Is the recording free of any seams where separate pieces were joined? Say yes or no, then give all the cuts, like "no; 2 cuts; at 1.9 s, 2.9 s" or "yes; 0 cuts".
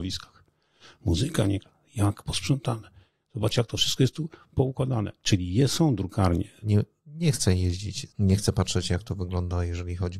no; 2 cuts; at 6.6 s, 8.1 s